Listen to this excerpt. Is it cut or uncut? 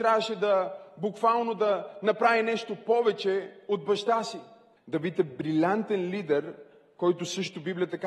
cut